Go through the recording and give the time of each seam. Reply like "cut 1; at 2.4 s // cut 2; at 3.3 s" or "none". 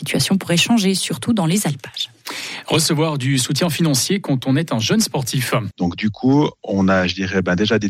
cut 1; at 5.7 s